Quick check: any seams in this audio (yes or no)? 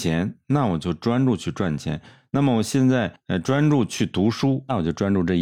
no